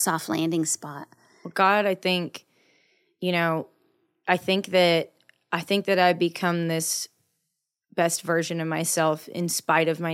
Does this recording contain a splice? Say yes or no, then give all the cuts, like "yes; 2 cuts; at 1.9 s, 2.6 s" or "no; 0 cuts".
no; 0 cuts